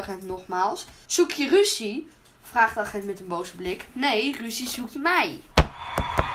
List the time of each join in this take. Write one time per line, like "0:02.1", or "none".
0:01.0